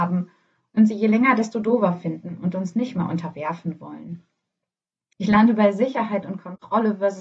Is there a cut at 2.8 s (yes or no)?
no